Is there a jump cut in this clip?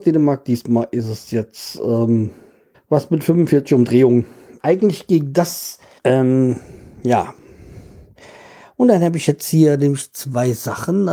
yes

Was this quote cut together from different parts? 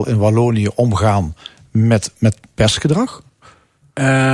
no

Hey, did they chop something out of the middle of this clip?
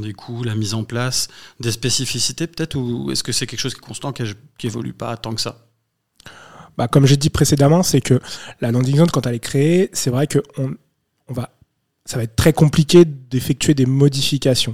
no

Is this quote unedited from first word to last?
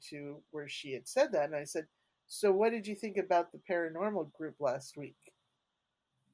yes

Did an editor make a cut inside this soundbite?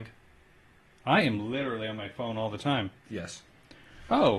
yes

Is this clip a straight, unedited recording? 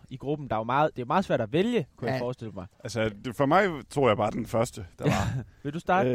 yes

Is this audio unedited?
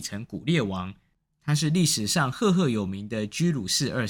yes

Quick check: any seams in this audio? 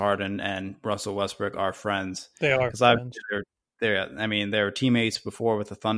no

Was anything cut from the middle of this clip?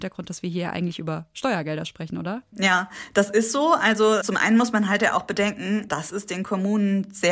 yes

